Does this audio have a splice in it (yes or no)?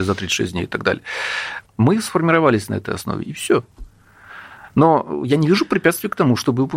yes